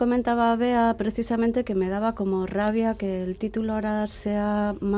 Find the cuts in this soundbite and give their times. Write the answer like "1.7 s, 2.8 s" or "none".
none